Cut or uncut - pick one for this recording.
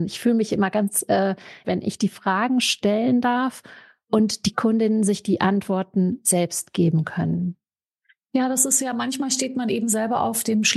cut